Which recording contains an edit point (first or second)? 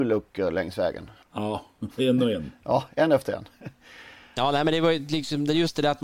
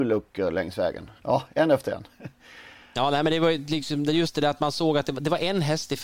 second